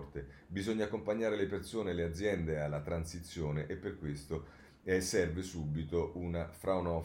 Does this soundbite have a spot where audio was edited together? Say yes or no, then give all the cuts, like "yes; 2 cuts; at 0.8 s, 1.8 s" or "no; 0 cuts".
no; 0 cuts